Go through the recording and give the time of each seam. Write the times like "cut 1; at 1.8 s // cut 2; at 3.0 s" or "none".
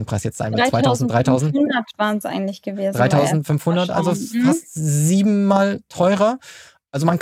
none